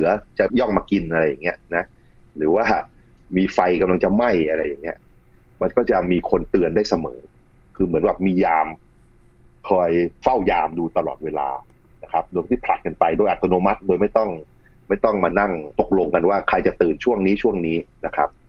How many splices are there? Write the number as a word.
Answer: one